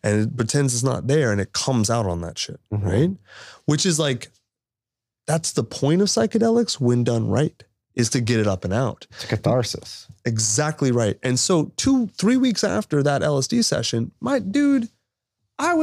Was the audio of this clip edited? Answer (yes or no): no